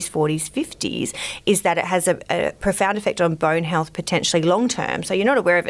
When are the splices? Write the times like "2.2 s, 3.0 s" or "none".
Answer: none